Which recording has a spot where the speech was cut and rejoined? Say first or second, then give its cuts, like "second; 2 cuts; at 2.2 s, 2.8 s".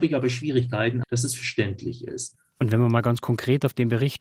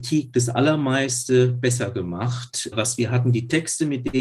first; 1 cut; at 1.0 s